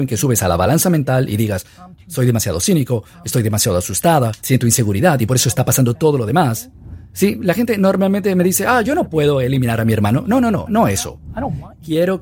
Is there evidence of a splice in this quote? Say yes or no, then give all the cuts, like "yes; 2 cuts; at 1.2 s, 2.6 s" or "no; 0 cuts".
yes; 2 cuts; at 4.4 s, 7.1 s